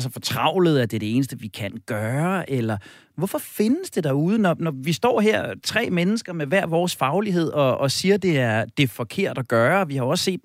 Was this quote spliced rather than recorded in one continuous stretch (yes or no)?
no